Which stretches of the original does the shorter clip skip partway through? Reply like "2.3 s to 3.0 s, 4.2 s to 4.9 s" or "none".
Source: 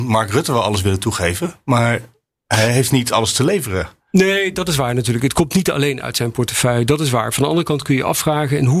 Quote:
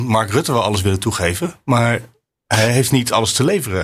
none